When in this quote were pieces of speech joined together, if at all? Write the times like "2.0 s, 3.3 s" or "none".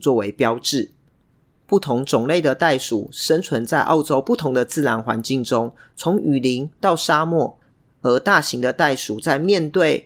none